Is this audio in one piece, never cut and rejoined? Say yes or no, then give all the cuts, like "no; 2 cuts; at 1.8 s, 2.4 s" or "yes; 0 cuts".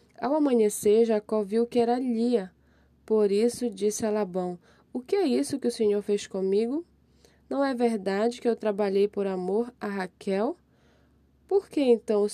yes; 0 cuts